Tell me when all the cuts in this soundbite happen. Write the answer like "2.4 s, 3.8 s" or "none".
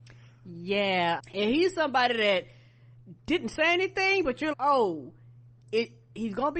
1.2 s, 4.5 s